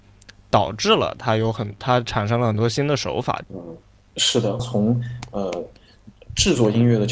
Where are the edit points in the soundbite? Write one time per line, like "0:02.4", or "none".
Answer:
0:03.4
0:04.6